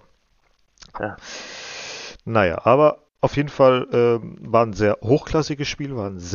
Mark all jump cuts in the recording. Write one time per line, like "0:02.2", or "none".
0:00.9